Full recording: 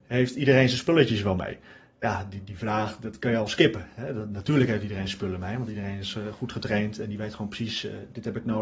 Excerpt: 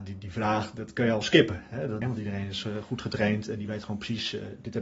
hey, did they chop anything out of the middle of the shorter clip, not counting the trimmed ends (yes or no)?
yes